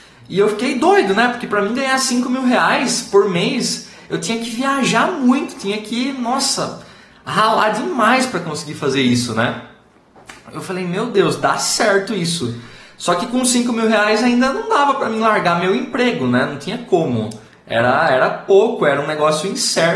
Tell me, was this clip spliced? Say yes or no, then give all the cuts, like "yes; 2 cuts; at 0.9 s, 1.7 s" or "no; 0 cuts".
no; 0 cuts